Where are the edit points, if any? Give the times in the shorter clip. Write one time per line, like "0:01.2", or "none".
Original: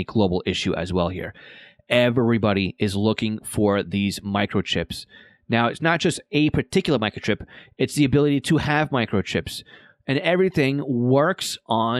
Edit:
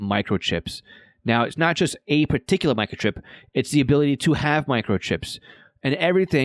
none